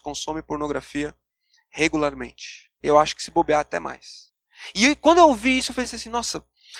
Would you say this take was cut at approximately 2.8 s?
yes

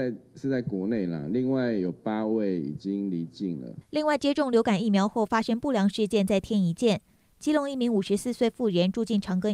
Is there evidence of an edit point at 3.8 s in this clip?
yes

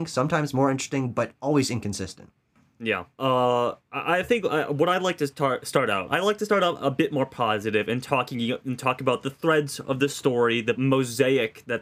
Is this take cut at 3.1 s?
yes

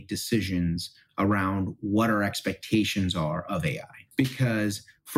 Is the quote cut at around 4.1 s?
yes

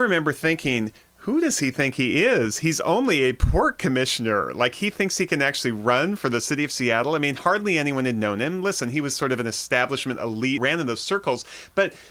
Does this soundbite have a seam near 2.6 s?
no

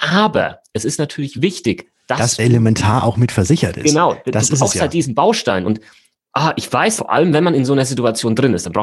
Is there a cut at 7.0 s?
yes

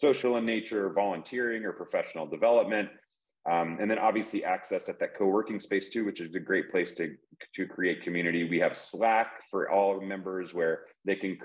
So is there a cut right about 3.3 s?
no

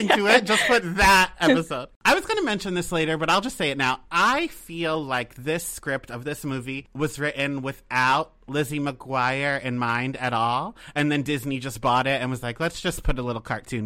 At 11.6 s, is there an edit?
no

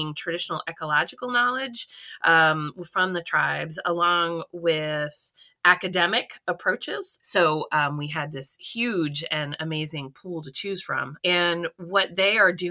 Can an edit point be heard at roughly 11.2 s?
yes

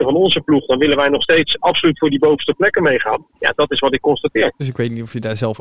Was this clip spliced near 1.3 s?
no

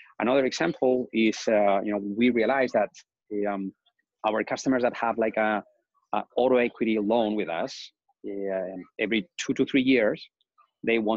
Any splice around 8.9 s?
no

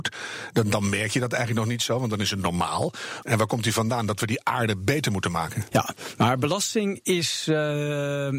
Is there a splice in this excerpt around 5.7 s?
yes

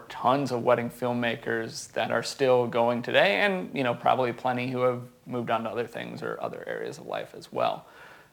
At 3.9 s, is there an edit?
no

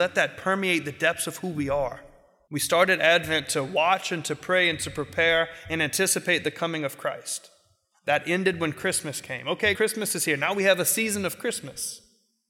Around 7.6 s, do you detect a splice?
no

